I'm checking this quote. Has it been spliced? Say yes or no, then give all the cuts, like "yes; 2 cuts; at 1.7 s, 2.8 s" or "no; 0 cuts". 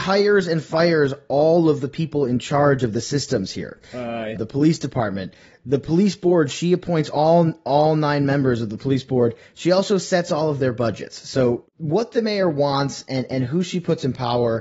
yes; 1 cut; at 4.4 s